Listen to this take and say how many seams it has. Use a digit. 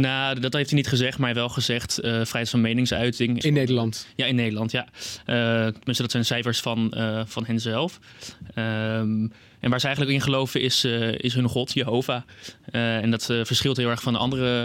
1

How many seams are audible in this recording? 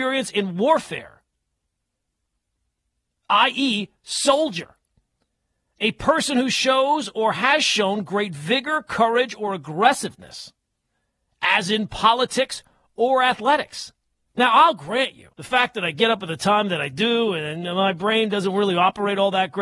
2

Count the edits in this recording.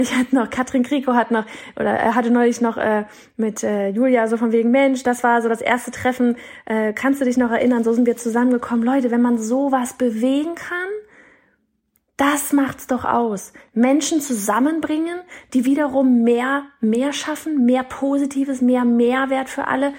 0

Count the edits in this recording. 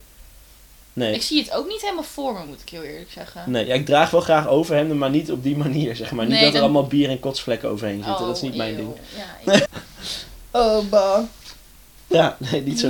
1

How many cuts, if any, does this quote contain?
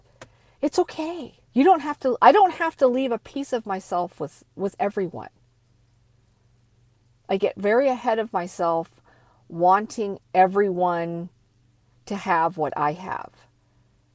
1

